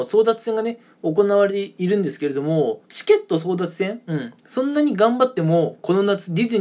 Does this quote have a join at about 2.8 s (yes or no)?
yes